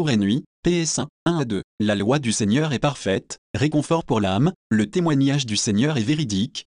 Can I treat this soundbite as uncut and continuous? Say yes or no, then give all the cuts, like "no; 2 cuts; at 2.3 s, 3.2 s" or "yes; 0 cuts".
yes; 0 cuts